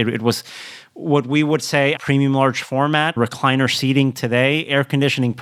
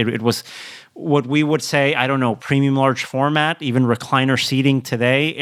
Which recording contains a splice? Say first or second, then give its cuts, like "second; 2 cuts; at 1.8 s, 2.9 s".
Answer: first; 2 cuts; at 2.0 s, 3.2 s